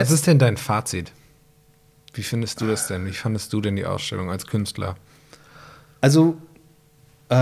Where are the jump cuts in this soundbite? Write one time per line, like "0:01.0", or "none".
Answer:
none